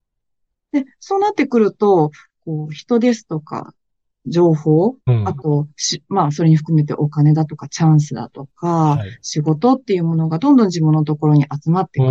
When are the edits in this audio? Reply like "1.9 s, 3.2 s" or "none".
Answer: none